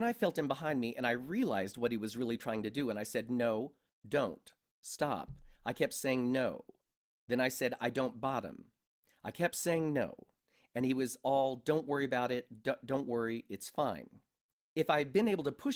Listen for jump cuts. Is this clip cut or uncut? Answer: uncut